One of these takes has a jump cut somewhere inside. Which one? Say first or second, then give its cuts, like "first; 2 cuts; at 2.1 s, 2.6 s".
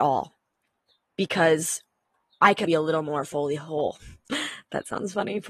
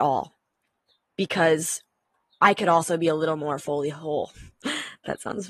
first; 1 cut; at 2.7 s